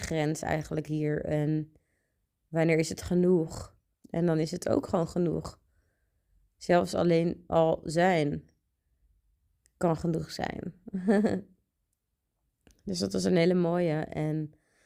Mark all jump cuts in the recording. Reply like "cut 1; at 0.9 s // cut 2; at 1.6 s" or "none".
cut 1; at 3.9 s